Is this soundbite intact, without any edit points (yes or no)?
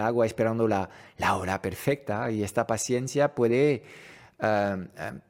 yes